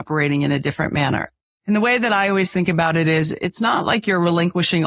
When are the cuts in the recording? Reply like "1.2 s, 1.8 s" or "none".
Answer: none